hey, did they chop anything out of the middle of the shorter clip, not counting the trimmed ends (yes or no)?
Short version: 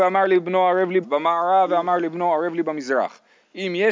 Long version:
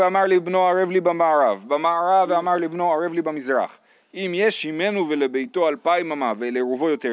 yes